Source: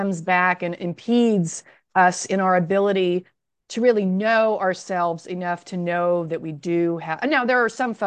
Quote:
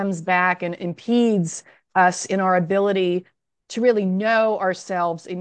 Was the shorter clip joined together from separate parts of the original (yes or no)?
no